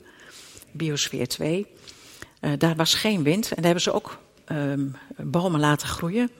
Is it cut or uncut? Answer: uncut